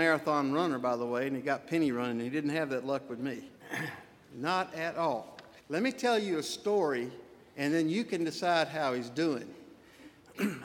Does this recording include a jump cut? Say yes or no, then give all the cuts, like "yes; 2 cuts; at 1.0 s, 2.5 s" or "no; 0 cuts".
yes; 2 cuts; at 3.6 s, 5.6 s